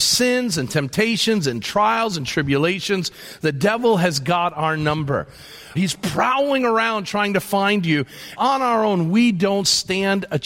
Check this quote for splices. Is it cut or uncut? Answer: cut